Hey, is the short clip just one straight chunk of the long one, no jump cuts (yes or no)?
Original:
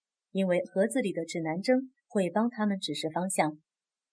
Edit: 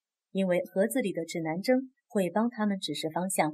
yes